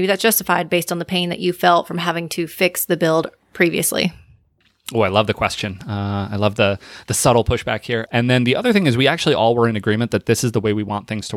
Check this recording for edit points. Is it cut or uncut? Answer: cut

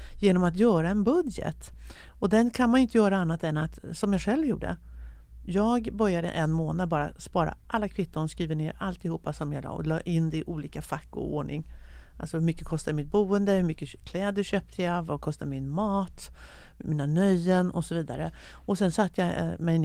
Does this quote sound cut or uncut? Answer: uncut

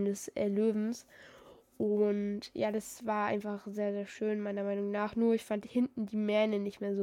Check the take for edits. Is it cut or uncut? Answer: uncut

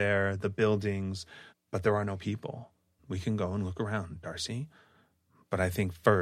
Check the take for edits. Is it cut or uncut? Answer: cut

